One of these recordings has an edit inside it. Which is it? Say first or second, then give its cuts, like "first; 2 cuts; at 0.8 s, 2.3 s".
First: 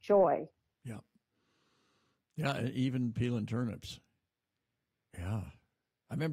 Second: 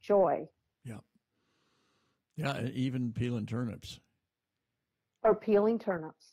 first; 1 cut; at 5.1 s